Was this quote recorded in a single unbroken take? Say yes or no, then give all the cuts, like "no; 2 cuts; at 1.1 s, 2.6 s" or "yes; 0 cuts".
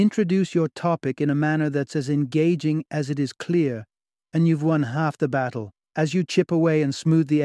no; 1 cut; at 5.8 s